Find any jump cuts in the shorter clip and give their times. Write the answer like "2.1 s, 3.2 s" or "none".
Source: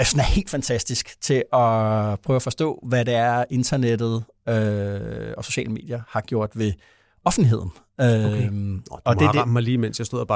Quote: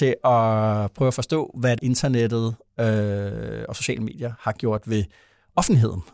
1.8 s